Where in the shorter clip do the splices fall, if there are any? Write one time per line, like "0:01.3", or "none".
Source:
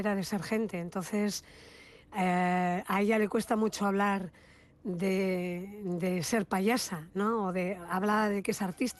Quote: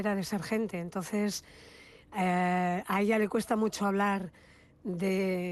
none